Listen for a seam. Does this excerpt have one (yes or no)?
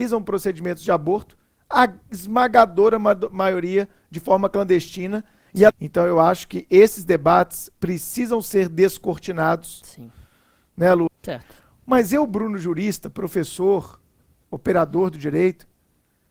yes